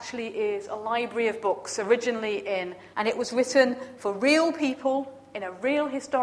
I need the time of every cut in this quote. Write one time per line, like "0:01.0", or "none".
0:02.9